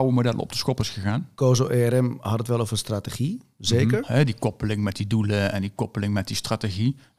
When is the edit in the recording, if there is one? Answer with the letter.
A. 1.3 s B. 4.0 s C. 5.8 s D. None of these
B